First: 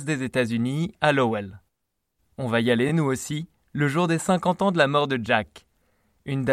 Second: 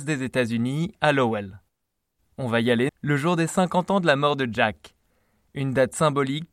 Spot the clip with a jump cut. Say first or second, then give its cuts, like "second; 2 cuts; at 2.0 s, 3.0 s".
second; 1 cut; at 2.9 s